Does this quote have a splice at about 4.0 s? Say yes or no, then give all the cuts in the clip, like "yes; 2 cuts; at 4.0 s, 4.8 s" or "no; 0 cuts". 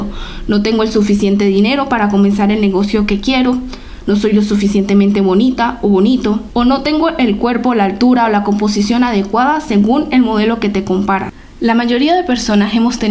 no; 1 cut; at 6.5 s